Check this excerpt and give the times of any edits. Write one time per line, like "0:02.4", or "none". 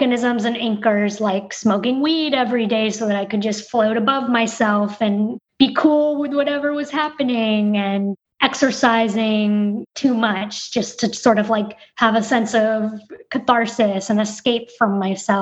none